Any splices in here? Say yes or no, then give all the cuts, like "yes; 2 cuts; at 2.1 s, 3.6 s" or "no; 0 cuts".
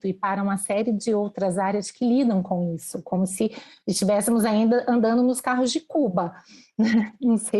no; 0 cuts